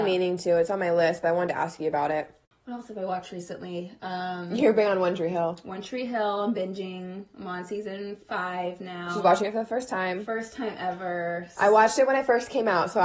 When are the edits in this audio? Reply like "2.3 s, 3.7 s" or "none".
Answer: none